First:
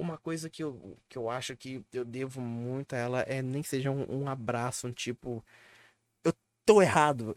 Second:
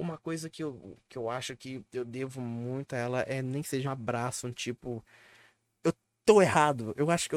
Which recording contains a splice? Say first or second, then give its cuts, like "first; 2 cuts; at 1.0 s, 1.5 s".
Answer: second; 1 cut; at 3.8 s